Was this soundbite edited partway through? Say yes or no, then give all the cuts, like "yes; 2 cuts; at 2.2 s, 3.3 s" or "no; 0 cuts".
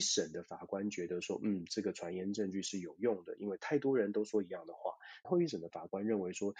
yes; 1 cut; at 5.2 s